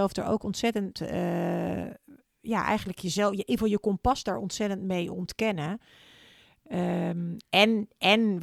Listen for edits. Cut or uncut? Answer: uncut